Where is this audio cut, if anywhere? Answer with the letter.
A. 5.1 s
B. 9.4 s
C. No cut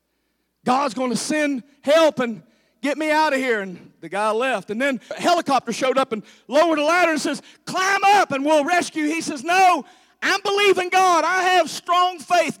A